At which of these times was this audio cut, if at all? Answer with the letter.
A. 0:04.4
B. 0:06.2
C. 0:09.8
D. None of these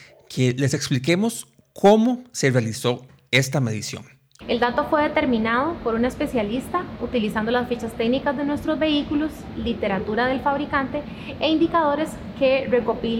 A